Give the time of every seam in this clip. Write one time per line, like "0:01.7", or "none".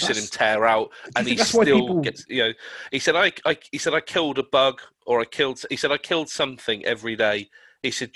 0:02.2